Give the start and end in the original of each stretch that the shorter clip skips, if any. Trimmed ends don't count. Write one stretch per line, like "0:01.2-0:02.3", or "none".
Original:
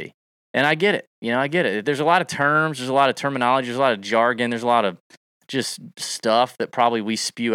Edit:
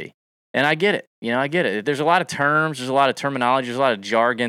none